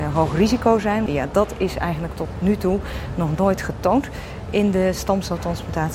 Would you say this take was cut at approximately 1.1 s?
yes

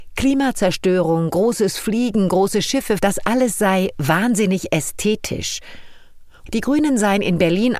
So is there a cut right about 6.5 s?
yes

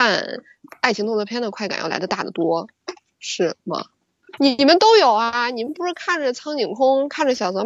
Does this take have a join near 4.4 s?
yes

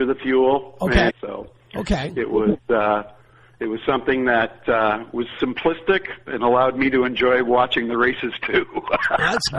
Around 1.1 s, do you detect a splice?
yes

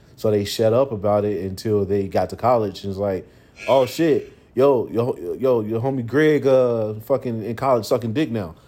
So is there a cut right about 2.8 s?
no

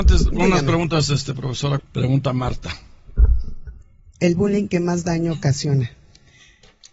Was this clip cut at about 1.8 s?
yes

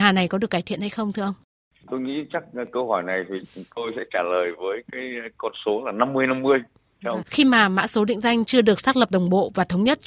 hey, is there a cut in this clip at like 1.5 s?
no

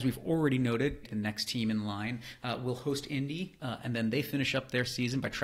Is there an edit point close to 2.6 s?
no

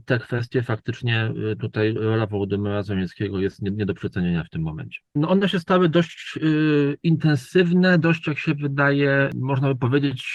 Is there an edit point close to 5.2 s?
yes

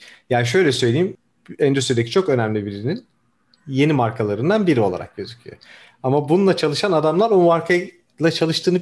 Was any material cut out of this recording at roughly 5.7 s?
no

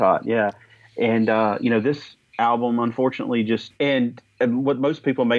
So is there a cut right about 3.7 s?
yes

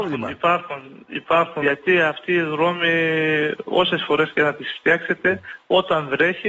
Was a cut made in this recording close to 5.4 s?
no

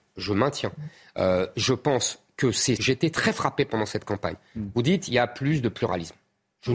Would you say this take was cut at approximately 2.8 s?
yes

